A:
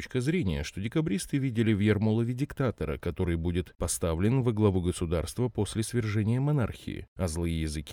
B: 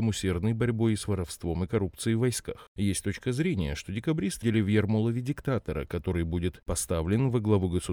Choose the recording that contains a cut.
B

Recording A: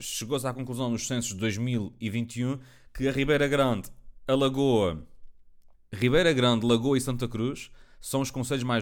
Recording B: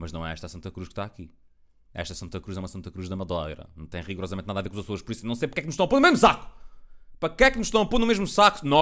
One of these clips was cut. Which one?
A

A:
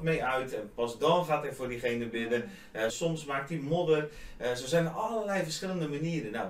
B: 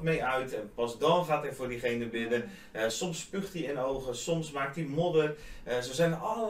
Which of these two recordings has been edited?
A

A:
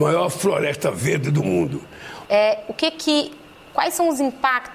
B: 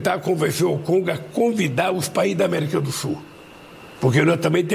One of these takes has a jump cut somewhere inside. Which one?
A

